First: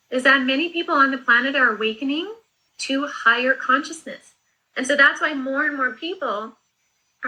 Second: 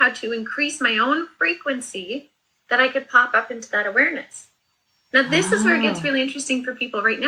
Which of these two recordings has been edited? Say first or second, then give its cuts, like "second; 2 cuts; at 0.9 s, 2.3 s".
first; 1 cut; at 2.7 s